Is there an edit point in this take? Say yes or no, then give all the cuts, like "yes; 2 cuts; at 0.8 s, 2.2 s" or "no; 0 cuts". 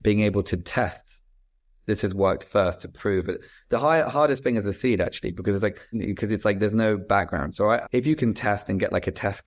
yes; 2 cuts; at 5.9 s, 7.8 s